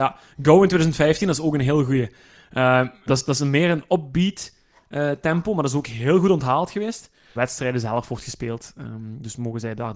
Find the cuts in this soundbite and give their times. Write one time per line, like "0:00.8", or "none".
0:03.1
0:07.4

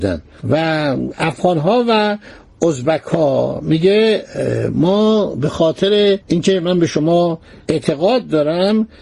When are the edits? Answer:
0:06.2

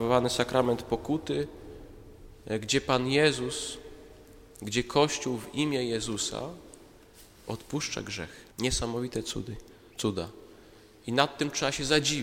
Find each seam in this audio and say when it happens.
0:08.5

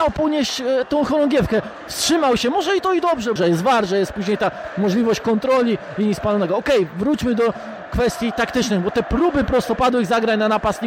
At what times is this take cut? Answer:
0:03.4

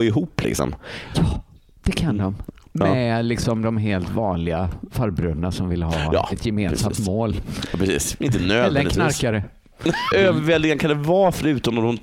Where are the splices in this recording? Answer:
0:08.2
0:10.1

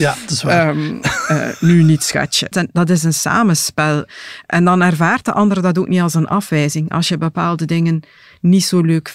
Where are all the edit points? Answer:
0:02.5

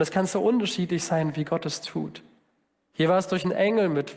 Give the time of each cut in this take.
none

